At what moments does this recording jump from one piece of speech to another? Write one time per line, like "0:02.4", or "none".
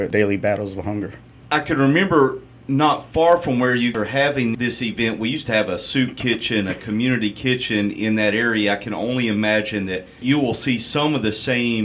none